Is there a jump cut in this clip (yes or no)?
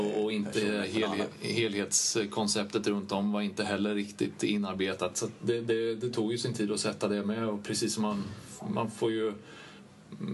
no